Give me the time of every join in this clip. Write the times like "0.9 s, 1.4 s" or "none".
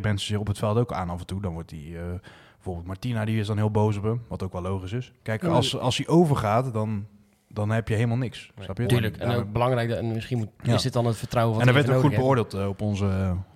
5.2 s, 8.8 s